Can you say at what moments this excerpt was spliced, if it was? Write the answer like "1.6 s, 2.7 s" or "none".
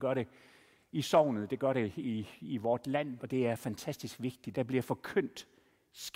3.2 s, 4.5 s